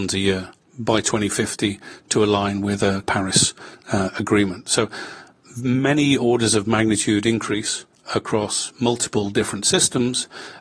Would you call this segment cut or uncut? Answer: uncut